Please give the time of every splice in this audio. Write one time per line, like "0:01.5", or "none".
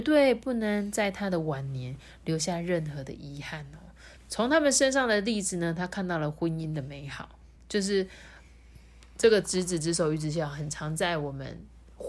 0:04.2
0:07.5

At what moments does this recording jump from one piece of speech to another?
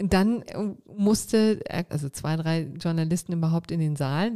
0:01.9

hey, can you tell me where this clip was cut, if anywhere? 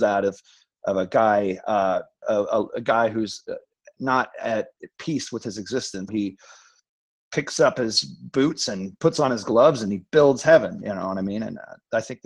0:02.2
0:06.1

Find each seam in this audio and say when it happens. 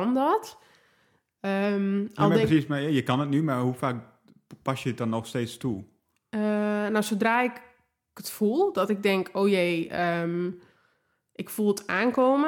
none

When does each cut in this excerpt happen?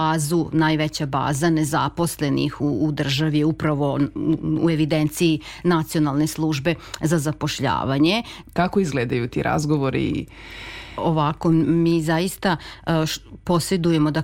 0:08.4

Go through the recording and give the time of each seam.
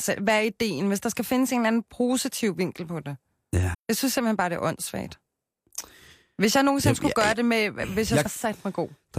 0:03.7
0:08.3

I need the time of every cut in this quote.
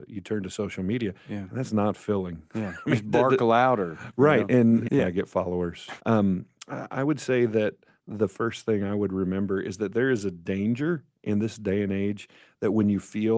0:04.9
0:06.0

